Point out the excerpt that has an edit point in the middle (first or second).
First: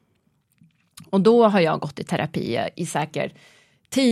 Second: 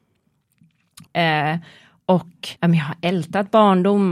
second